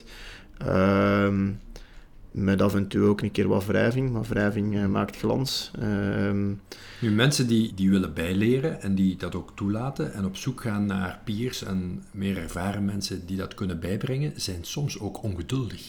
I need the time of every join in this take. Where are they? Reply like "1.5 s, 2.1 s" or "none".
7.7 s